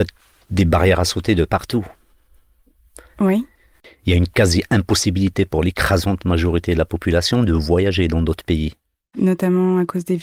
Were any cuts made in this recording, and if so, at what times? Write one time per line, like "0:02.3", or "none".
none